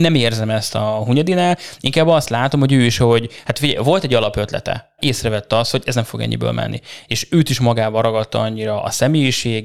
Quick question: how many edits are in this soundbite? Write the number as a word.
one